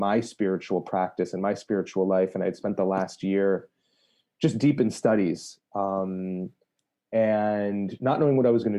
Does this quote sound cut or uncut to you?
uncut